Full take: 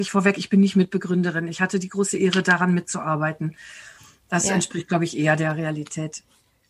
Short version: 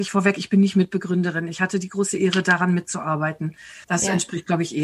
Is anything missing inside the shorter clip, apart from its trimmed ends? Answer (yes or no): yes